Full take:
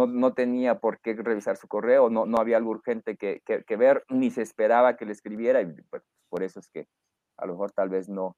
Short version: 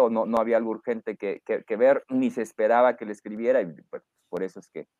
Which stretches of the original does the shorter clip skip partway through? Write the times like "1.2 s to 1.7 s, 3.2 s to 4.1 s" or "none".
none